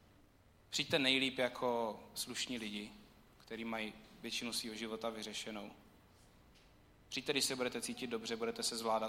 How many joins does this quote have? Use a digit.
0